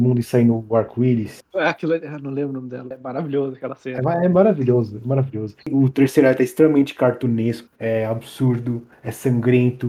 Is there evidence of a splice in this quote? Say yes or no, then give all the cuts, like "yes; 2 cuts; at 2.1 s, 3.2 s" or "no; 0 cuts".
yes; 1 cut; at 5.6 s